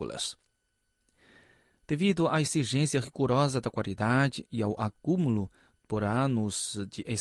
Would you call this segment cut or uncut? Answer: uncut